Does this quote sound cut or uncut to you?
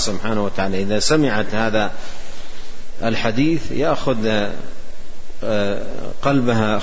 uncut